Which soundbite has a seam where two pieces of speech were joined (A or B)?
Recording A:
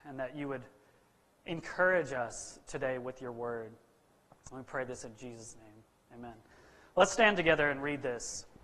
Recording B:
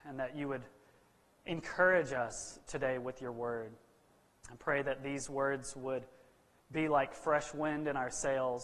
A